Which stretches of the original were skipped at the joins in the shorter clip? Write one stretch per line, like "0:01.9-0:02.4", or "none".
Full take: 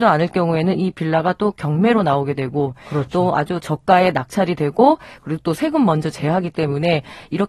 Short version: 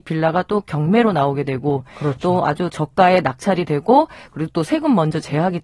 none